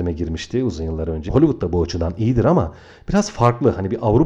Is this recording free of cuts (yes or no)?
no